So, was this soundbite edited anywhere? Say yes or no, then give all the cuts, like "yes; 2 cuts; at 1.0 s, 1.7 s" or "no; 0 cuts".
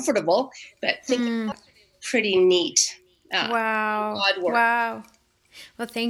yes; 1 cut; at 1.5 s